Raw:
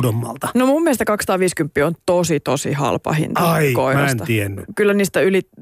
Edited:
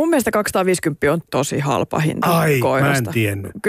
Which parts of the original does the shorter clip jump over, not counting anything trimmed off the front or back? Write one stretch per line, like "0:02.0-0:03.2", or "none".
0:02.0-0:02.4